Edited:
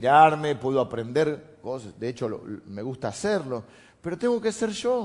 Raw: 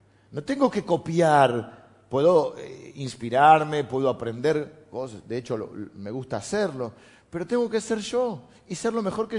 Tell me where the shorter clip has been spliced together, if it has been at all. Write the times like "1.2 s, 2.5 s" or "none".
none